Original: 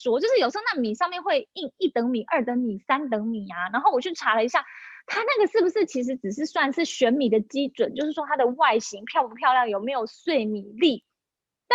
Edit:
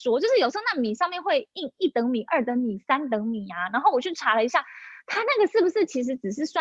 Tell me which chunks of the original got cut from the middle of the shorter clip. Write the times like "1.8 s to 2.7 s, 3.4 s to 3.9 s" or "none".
none